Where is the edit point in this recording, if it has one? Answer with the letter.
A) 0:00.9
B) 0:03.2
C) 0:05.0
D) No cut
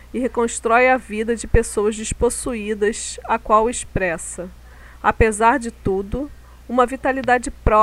D